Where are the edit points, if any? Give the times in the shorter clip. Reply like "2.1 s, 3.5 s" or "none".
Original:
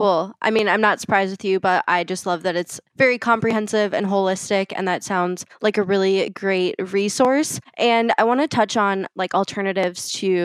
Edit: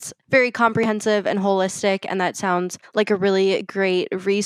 none